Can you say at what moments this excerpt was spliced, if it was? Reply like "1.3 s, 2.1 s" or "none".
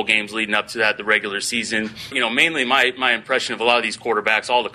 2.1 s